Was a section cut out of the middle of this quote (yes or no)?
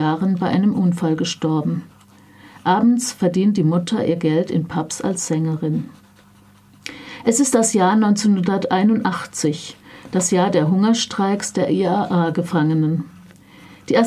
no